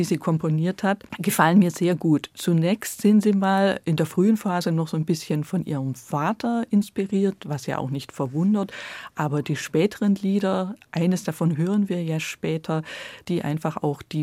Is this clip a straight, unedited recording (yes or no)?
no